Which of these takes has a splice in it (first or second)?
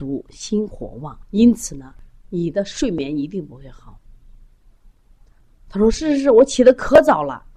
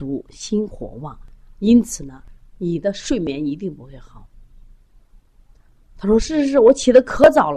first